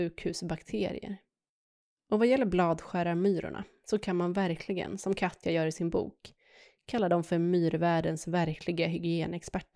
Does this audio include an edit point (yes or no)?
no